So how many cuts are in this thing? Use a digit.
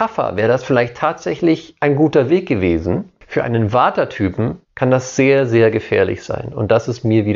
2